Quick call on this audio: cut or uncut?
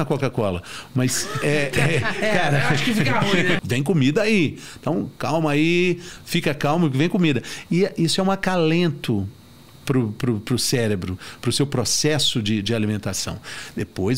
cut